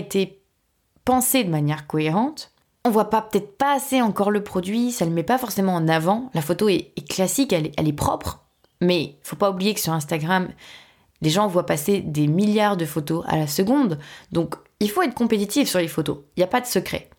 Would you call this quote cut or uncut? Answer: cut